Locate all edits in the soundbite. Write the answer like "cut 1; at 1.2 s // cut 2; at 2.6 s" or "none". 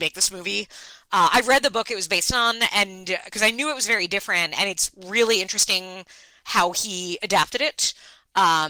none